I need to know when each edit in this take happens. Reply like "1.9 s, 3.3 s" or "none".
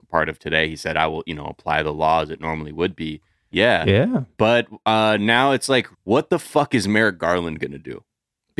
3.5 s, 5.9 s